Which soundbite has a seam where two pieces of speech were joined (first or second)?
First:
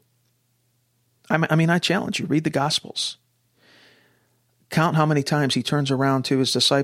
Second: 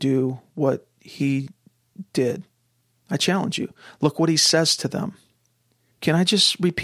second